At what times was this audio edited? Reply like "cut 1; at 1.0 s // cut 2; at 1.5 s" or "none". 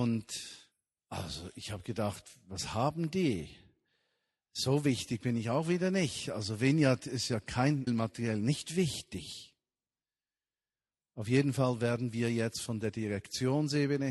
cut 1; at 7.9 s